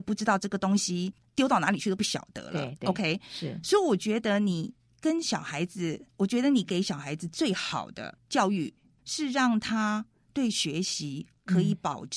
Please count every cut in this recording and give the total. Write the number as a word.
zero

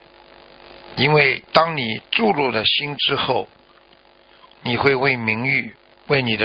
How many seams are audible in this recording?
one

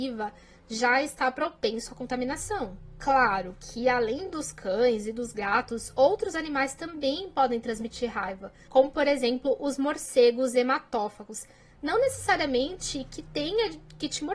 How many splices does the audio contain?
zero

